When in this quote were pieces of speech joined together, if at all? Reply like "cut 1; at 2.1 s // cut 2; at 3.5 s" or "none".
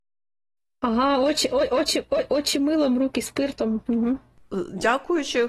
none